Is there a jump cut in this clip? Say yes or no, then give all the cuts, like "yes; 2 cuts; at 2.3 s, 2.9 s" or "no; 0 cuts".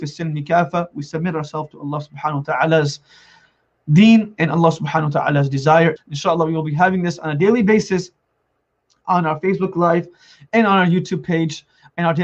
yes; 1 cut; at 6.0 s